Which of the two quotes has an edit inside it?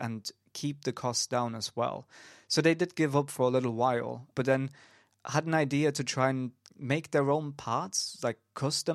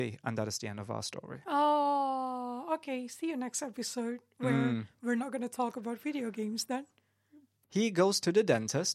second; 1 cut; at 7.6 s

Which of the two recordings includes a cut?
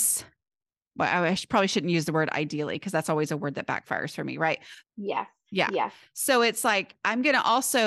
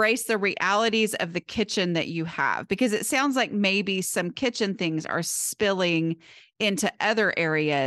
first; 1 cut; at 4.8 s

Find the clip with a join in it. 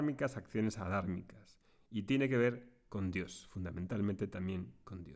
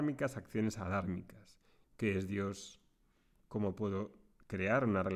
second; 1 cut; at 1.8 s

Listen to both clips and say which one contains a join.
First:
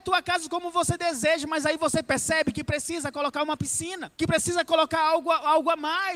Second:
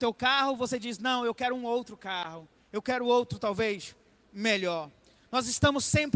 first; 1 cut; at 4.1 s

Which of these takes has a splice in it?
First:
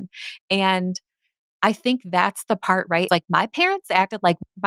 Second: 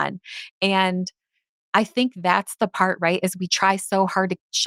first; 1 cut; at 3.1 s

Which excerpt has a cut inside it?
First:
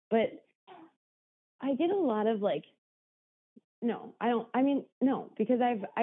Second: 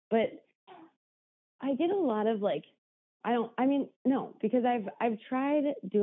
second; 1 cut; at 3.2 s

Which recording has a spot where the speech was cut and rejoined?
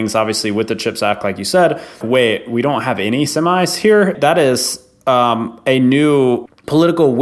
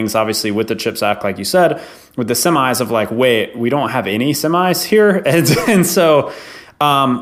first; 2 cuts; at 2.0 s, 4.1 s

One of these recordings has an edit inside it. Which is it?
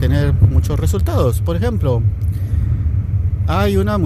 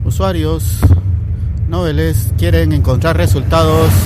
second; 1 cut; at 2.3 s

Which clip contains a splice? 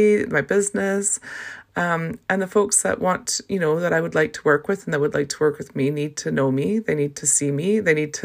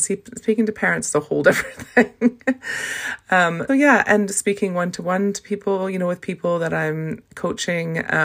second; 1 cut; at 3.7 s

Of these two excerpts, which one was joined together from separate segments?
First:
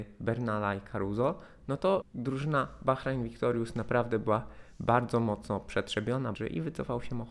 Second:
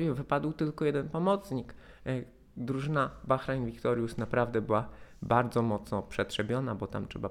first; 2 cuts; at 2.0 s, 6.3 s

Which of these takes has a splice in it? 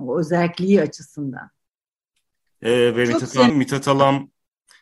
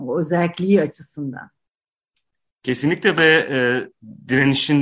first; 2 cuts; at 2.5 s, 3.5 s

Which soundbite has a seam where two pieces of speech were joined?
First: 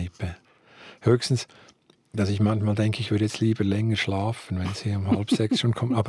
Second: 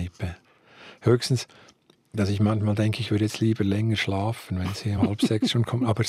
second; 1 cut; at 5.0 s

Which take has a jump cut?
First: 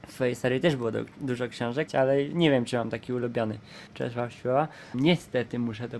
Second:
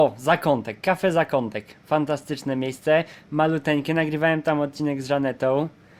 first; 3 cuts; at 1.9 s, 3.9 s, 4.9 s

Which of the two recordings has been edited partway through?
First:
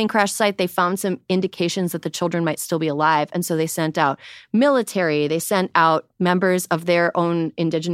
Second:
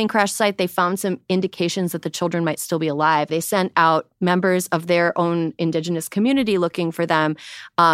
second; 1 cut; at 3.3 s

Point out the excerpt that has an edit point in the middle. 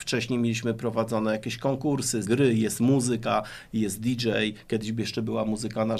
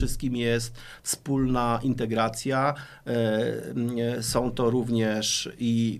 first; 1 cut; at 2.2 s

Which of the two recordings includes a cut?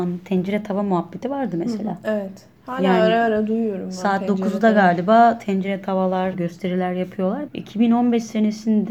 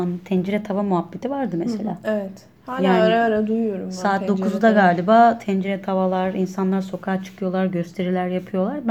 first; 2 cuts; at 6.3 s, 7.5 s

